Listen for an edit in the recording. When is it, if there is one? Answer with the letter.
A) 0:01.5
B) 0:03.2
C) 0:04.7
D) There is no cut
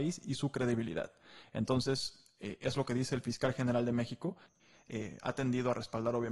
C